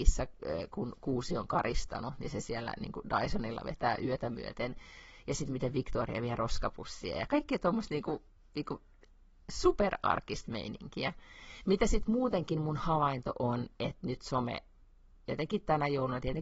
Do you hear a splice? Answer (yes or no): no